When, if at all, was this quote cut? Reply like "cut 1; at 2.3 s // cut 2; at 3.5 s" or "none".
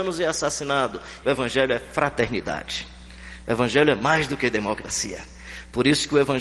cut 1; at 1.2 s